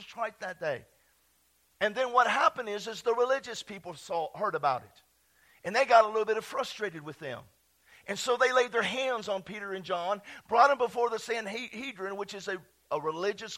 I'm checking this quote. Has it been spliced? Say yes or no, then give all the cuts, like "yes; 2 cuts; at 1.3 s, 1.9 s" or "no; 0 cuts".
no; 0 cuts